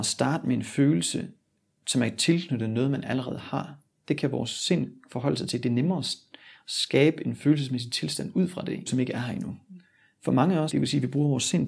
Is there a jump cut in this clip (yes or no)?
yes